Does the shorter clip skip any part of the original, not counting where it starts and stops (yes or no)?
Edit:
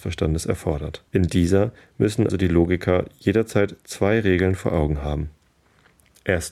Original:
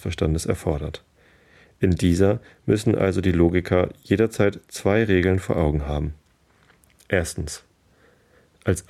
yes